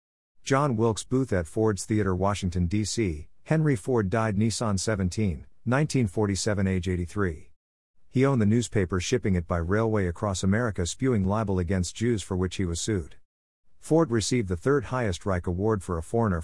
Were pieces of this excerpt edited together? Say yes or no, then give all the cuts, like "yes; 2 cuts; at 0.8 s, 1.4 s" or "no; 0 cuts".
no; 0 cuts